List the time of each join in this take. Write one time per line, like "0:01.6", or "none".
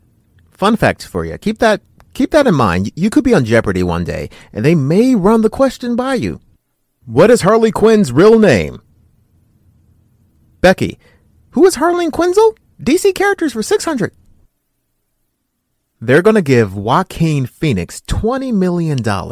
0:12.6

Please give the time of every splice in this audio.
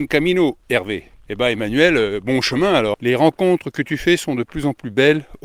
0:02.9

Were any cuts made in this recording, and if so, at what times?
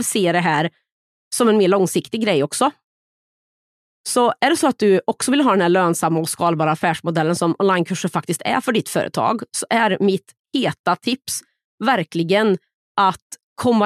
none

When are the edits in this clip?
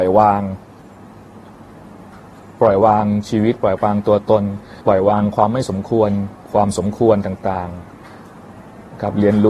0:04.8
0:06.4

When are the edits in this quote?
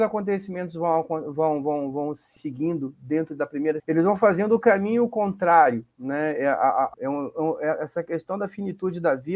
0:03.8
0:06.9

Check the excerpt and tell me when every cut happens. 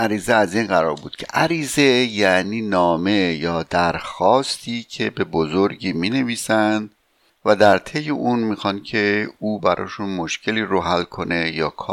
none

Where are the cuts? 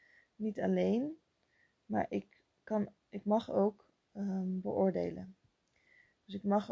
none

